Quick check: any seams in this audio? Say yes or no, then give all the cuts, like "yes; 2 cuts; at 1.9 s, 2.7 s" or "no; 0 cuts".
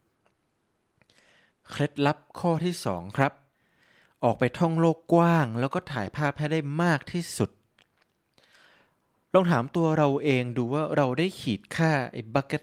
no; 0 cuts